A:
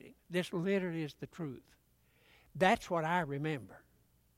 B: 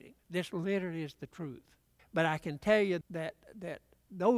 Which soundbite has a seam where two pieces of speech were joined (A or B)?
B